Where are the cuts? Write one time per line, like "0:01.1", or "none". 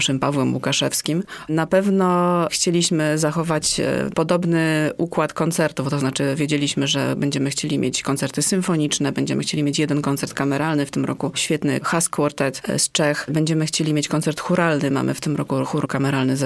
0:01.5